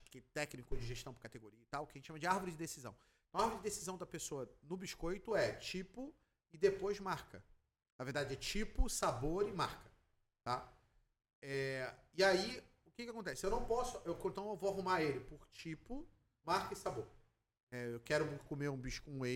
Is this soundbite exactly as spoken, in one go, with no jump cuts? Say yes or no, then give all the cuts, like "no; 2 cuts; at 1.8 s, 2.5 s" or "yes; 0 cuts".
no; 1 cut; at 16.4 s